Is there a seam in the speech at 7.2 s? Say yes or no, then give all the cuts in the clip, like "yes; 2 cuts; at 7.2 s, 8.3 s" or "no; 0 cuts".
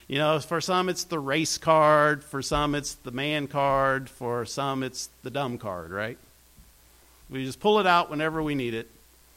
yes; 1 cut; at 7.2 s